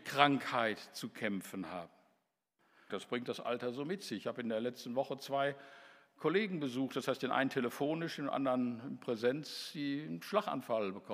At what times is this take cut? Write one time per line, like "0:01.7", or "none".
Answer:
0:02.9